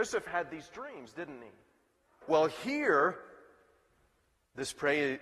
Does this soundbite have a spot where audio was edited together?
yes; 1 cut; at 2.2 s

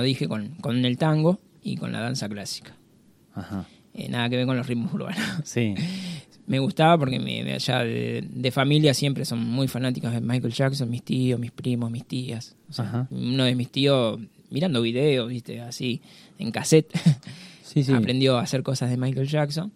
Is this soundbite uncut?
no; 1 cut; at 13.1 s

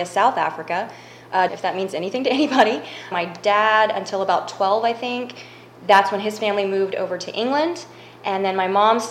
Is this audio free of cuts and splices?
no; 2 cuts; at 1.5 s, 3.1 s

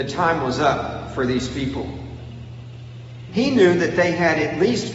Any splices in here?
yes; 1 cut; at 3.3 s

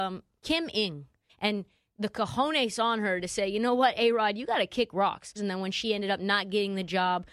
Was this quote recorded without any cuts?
no; 2 cuts; at 1.3 s, 5.4 s

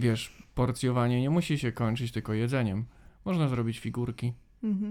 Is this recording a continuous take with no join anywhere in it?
yes; 0 cuts

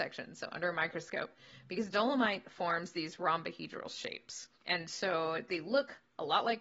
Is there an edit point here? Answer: yes; 1 cut; at 4.5 s

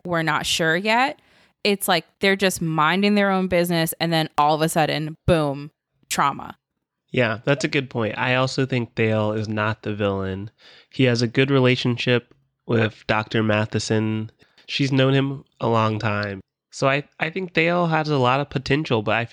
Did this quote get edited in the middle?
no; 0 cuts

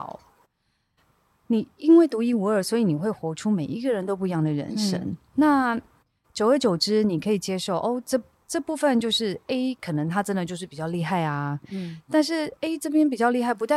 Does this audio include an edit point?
no; 0 cuts

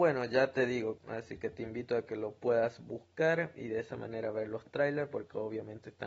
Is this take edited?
yes; 1 cut; at 1.0 s

